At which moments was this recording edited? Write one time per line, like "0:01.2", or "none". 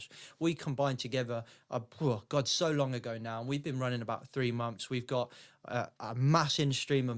none